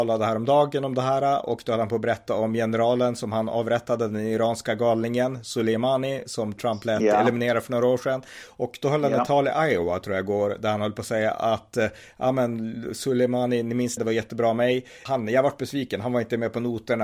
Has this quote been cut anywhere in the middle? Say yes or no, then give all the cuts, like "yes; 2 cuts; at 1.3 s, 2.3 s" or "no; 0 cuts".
yes; 2 cuts; at 14.0 s, 15.1 s